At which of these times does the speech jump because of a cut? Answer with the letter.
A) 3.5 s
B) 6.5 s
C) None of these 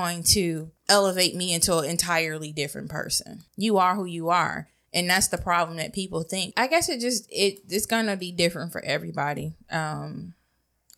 B